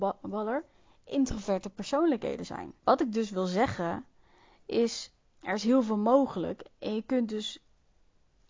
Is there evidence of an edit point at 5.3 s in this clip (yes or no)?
yes